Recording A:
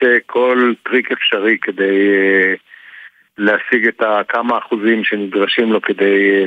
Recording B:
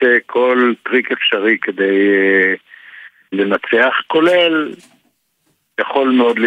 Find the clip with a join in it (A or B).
B